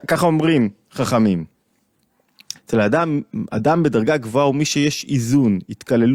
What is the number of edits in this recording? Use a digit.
1